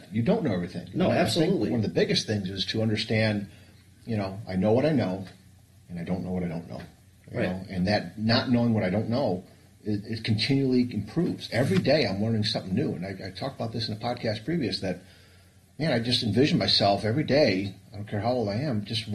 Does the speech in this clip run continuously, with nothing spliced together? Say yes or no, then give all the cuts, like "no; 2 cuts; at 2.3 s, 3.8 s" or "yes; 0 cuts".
yes; 0 cuts